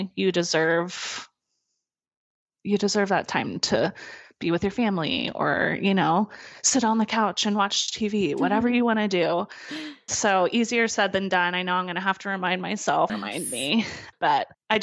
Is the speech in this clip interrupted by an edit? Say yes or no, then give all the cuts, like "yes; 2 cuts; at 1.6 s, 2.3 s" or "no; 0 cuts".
yes; 1 cut; at 13.1 s